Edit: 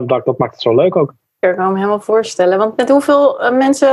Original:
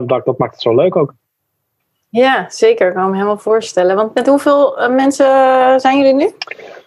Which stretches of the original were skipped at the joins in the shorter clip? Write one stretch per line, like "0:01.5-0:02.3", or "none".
0:01.4-0:02.8